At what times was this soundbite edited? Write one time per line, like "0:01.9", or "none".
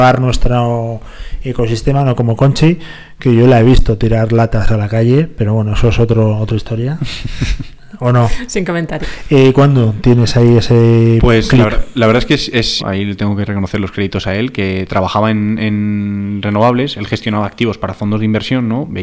0:09.0
0:12.8